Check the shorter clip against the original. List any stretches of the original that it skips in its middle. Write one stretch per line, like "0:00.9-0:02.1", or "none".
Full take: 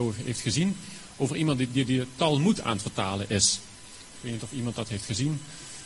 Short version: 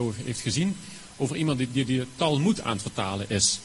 none